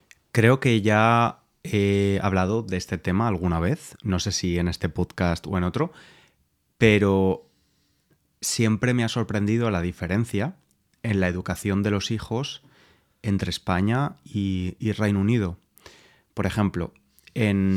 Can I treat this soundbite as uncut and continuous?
yes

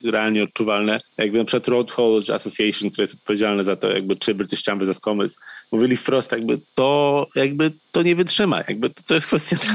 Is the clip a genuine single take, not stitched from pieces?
no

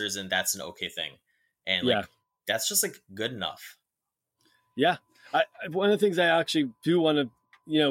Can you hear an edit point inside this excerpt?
no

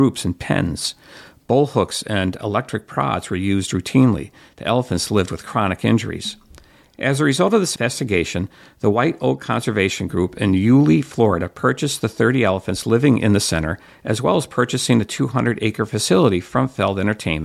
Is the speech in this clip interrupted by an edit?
no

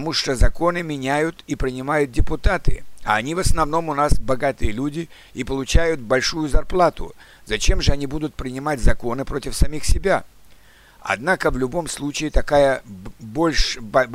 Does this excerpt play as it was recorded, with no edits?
yes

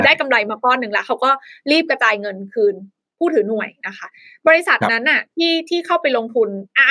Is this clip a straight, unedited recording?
yes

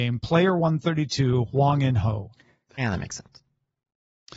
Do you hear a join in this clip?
yes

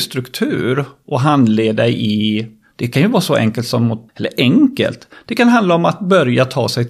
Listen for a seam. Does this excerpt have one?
yes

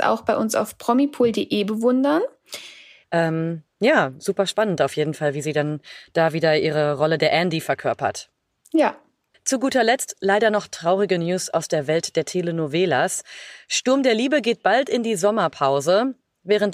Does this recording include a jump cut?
yes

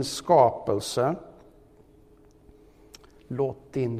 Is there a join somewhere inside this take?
no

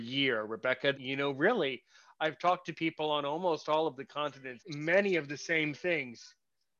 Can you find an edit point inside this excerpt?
yes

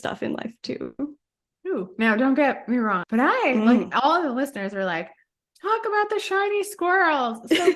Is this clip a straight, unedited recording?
no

